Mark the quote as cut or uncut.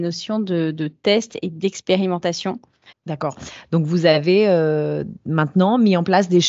cut